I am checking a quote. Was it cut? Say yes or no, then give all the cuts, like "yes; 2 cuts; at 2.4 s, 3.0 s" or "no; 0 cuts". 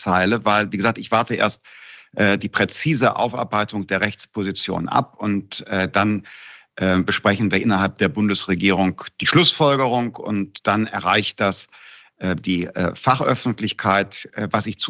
no; 0 cuts